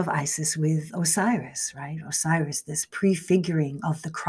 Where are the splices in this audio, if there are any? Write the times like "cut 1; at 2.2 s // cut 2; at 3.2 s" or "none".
none

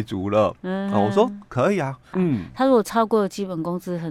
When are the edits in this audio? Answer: cut 1; at 2.1 s

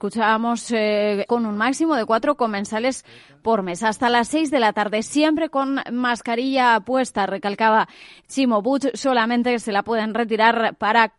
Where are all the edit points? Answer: cut 1; at 1.3 s

